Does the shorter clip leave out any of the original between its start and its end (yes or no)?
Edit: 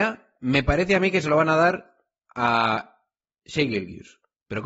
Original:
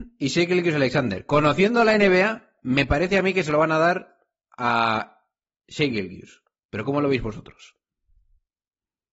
no